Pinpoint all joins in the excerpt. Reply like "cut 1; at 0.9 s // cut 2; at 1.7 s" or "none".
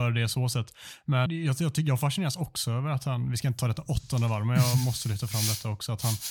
cut 1; at 1.3 s